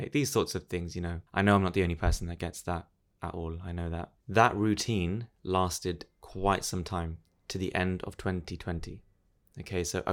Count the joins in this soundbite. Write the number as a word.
two